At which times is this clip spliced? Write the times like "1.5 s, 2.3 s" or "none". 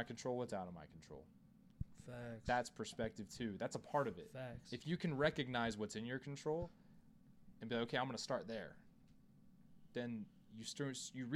none